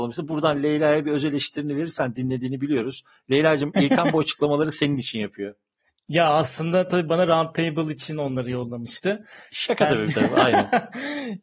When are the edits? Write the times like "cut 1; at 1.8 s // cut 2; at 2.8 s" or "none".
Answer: none